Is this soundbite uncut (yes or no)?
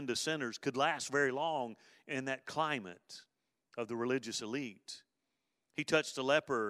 yes